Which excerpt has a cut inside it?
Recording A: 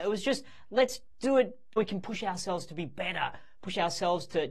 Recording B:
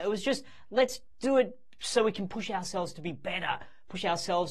A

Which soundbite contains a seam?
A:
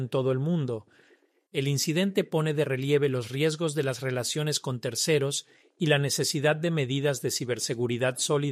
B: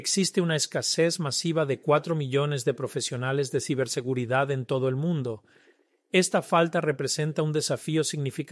A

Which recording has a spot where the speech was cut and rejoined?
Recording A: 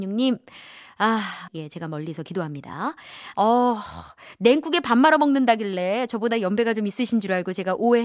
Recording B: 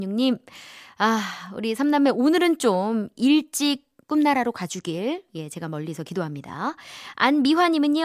A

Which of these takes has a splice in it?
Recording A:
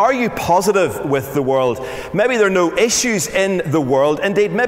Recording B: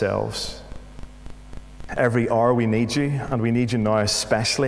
B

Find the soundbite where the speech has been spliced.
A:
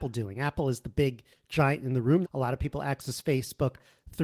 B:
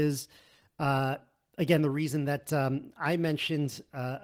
A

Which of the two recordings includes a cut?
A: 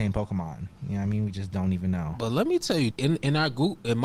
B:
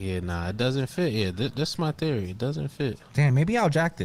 A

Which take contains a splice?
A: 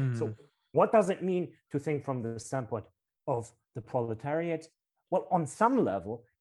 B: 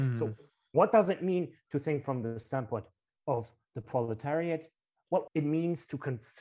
B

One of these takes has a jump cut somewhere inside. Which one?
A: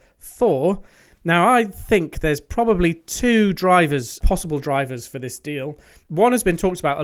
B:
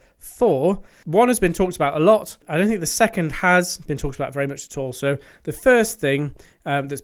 B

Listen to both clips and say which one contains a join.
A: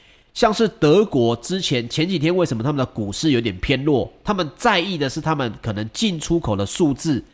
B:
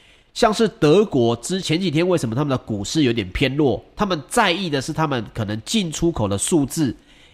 B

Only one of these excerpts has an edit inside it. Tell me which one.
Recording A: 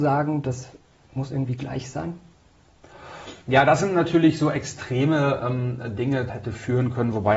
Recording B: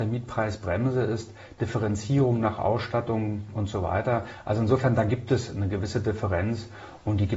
A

